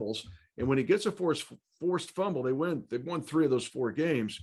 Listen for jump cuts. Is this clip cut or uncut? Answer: uncut